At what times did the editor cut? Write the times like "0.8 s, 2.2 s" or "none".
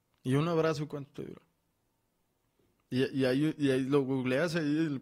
none